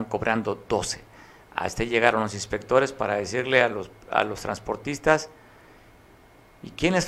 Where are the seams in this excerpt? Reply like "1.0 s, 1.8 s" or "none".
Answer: none